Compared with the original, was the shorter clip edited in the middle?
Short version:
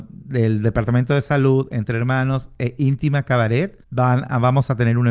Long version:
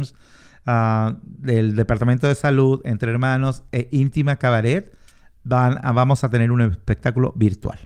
yes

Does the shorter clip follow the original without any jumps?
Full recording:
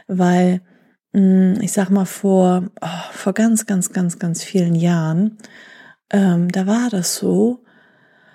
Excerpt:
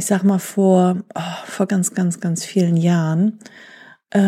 no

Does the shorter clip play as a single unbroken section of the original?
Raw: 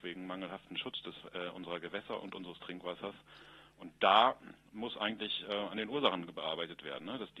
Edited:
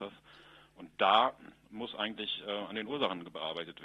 yes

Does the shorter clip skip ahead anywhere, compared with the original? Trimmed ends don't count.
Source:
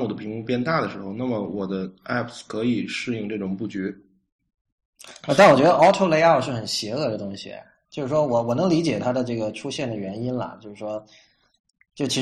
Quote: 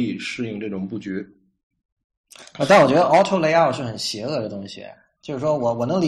no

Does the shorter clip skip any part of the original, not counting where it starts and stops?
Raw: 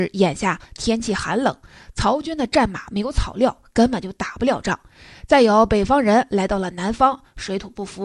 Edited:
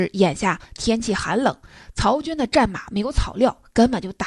no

